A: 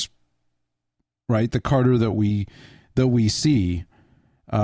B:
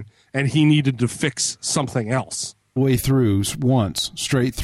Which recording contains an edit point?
B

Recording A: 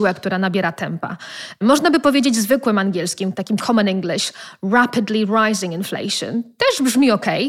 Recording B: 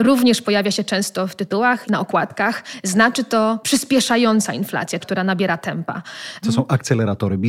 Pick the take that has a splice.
B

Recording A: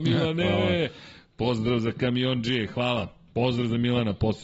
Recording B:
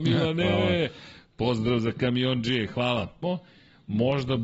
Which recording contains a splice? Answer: B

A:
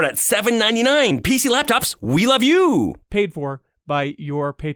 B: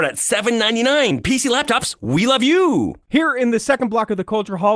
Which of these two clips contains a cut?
A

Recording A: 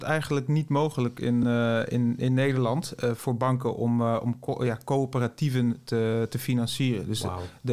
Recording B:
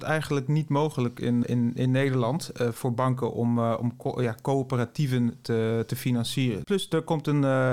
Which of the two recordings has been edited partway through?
B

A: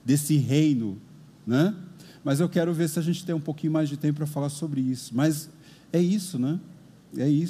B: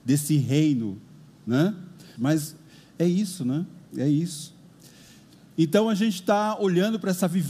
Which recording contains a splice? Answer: B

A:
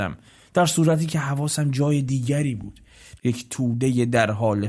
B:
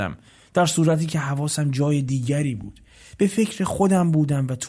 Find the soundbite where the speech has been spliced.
A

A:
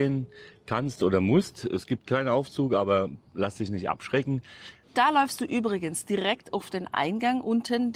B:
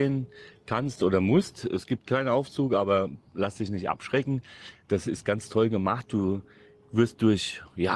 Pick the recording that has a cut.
A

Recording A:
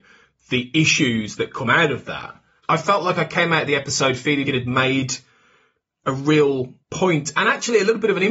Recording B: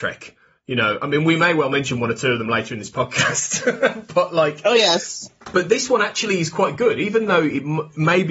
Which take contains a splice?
A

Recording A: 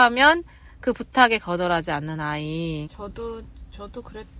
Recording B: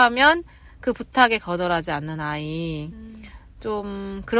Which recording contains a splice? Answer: A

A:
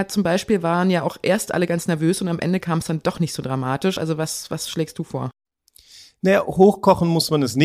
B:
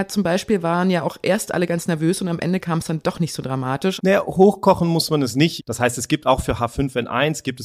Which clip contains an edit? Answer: B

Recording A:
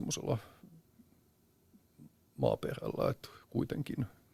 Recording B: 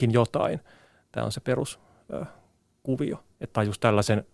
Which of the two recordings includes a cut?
B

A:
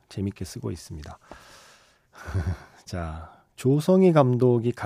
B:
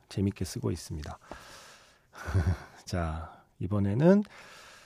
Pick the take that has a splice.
A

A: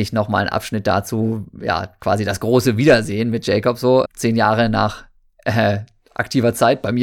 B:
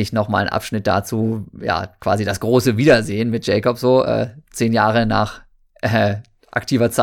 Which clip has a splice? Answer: A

